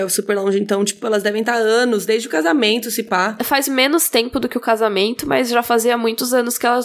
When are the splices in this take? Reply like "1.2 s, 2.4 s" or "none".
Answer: none

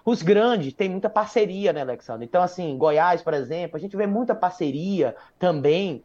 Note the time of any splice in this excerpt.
none

